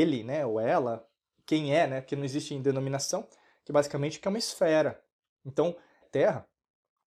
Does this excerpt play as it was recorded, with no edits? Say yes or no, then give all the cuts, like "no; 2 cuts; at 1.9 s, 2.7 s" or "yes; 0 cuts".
no; 1 cut; at 6.0 s